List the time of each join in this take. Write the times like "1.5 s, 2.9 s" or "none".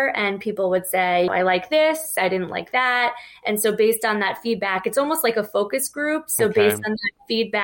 1.3 s